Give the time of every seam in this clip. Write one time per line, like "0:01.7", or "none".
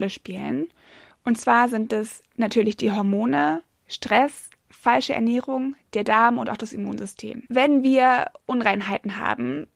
none